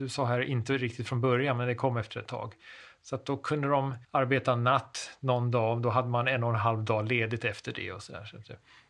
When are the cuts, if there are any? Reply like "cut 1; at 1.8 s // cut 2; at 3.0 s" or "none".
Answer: cut 1; at 4.0 s